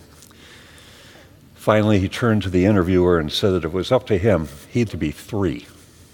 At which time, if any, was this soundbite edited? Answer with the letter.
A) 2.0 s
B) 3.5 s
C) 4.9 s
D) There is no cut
C